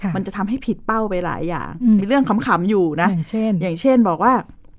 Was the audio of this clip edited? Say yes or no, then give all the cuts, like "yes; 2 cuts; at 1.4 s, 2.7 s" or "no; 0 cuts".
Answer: yes; 1 cut; at 2.0 s